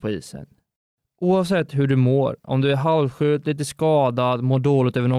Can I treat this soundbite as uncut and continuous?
yes; 0 cuts

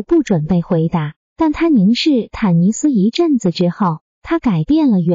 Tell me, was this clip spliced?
no; 0 cuts

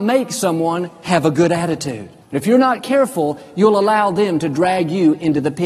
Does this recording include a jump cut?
yes; 1 cut; at 2.2 s

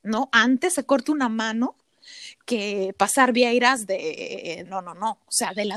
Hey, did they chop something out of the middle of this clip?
yes; 1 cut; at 4.6 s

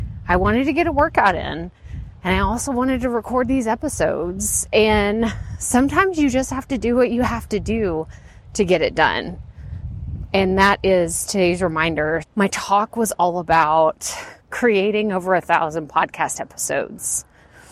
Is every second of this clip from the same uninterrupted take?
no; 2 cuts; at 12.2 s, 14.4 s

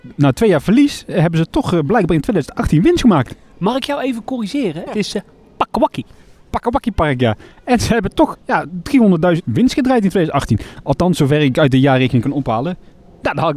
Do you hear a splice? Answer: yes; 3 cuts; at 4.9 s, 8.3 s, 9.4 s

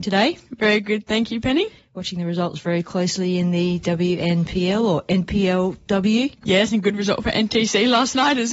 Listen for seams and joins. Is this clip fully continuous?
no; 1 cut; at 6.4 s

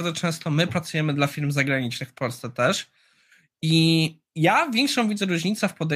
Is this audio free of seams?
yes; 0 cuts

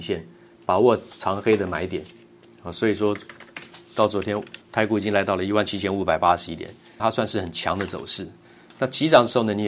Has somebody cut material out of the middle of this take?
yes; 3 cuts; at 2.4 s, 4.6 s, 7.0 s

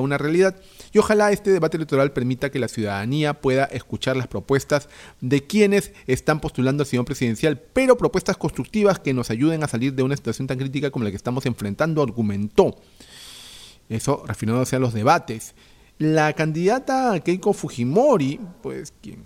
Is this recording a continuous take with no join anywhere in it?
no; 1 cut; at 16.0 s

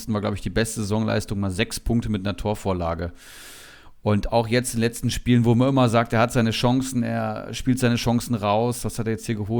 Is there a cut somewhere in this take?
no; 0 cuts

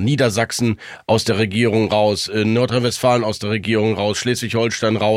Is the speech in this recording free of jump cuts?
yes; 0 cuts

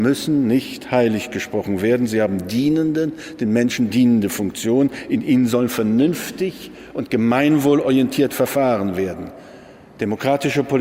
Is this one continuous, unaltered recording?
yes; 0 cuts

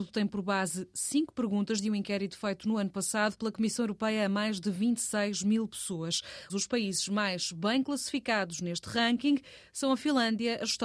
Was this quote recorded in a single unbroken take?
no; 1 cut; at 6.5 s

